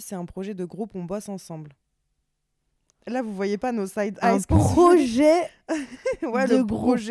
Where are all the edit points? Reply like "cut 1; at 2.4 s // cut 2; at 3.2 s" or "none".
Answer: none